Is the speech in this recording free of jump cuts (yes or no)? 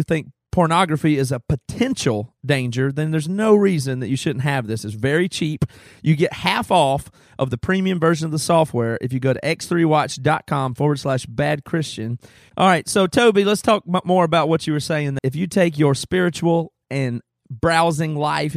no